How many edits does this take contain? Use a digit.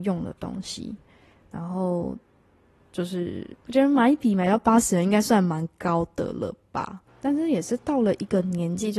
2